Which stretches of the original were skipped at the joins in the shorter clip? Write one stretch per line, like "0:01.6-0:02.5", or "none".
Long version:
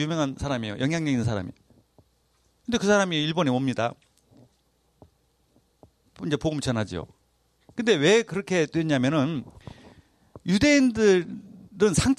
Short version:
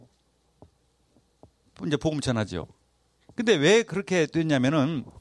none